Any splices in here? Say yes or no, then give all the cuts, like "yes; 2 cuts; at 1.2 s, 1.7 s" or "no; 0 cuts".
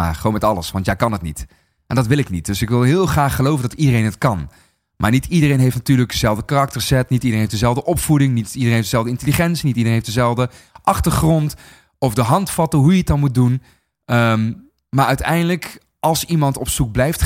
no; 0 cuts